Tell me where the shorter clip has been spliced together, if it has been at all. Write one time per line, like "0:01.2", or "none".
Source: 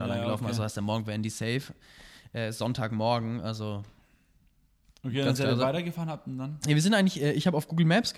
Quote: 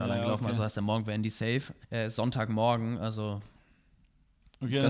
0:01.8